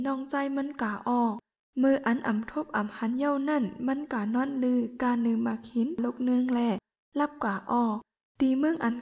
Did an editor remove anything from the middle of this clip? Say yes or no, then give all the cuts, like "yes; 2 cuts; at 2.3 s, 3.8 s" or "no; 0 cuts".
no; 0 cuts